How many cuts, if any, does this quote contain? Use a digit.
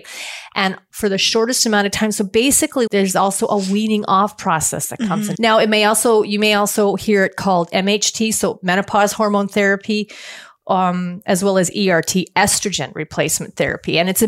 2